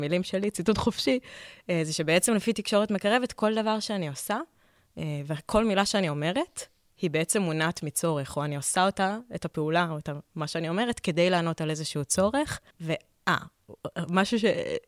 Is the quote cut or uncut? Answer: cut